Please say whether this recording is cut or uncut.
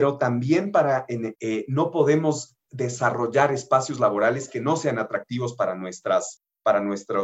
cut